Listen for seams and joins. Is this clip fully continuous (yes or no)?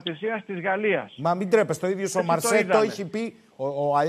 yes